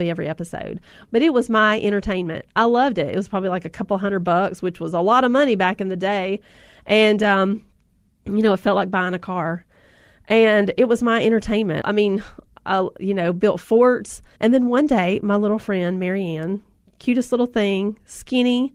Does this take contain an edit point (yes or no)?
yes